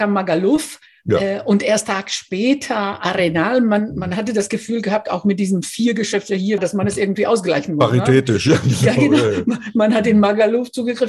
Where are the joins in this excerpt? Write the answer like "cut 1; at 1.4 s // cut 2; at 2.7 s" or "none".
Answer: cut 1; at 6.6 s